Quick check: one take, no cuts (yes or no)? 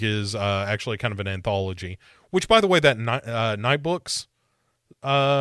yes